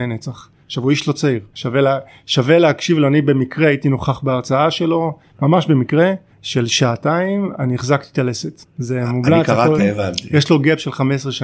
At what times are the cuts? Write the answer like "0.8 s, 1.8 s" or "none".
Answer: 9.8 s